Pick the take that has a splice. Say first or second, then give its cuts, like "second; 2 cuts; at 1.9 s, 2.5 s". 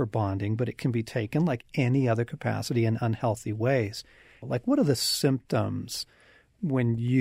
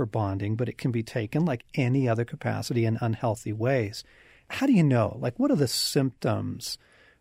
first; 1 cut; at 4.4 s